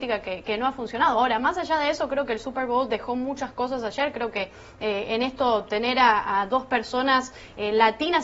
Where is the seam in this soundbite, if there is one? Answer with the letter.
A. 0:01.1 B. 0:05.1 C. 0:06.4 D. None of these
D